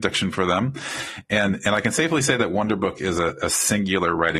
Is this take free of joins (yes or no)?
yes